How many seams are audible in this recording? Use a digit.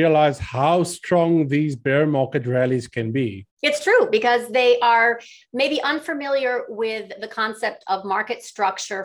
1